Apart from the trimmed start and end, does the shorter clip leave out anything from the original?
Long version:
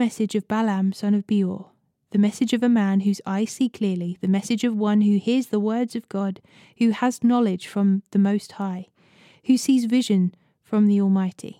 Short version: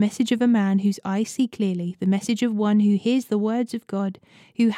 no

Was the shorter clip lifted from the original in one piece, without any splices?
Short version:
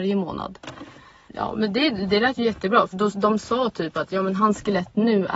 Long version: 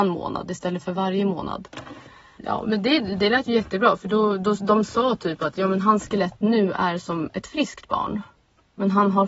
no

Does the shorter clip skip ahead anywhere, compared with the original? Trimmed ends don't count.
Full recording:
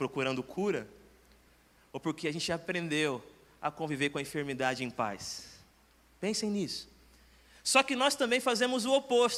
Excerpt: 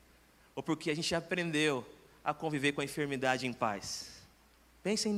no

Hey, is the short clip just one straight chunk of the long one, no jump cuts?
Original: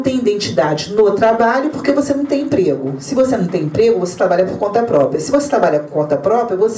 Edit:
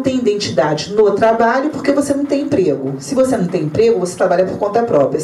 yes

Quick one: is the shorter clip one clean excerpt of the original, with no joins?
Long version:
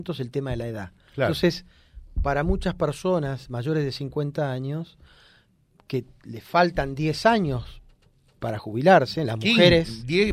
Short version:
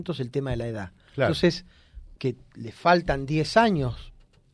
no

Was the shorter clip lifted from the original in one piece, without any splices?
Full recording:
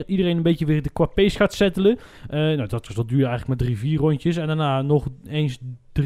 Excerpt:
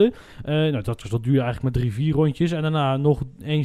yes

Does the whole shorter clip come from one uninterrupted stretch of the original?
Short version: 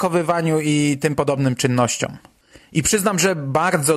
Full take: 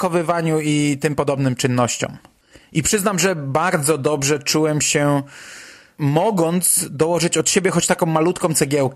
yes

